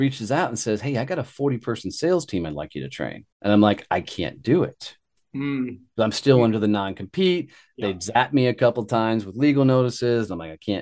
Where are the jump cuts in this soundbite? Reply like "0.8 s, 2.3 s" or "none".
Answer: 3.3 s